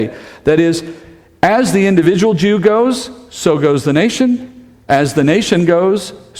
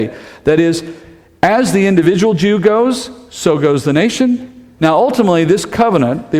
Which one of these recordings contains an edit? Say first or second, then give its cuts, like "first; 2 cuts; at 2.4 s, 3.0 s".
second; 1 cut; at 4.8 s